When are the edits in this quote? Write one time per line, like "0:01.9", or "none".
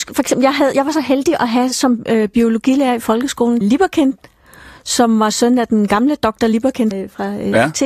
0:03.6
0:06.9